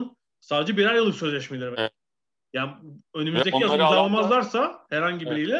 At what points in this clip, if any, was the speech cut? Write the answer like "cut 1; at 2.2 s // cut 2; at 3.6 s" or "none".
cut 1; at 1.7 s